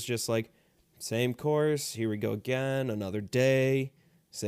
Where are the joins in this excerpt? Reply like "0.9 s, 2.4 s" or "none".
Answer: none